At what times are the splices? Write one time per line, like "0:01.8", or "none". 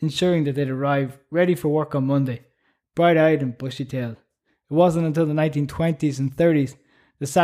0:04.5